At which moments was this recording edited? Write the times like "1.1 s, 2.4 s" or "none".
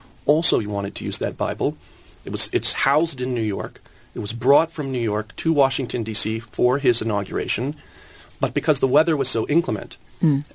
none